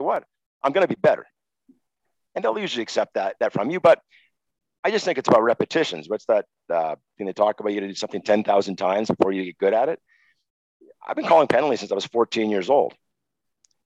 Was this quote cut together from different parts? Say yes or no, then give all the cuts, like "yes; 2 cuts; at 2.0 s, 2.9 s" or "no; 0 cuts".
no; 0 cuts